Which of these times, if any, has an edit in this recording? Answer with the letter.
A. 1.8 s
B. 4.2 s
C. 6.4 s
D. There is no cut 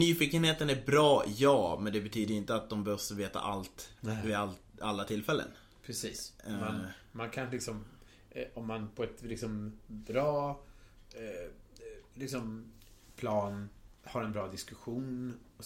D